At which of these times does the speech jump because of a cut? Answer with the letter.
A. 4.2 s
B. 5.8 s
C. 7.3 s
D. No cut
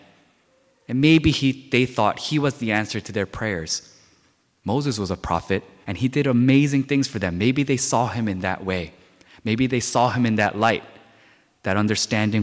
B